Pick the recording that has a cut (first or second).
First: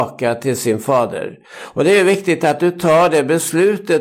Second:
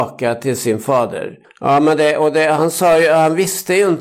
second